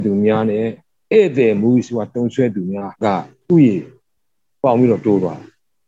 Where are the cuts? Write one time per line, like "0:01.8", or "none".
0:03.0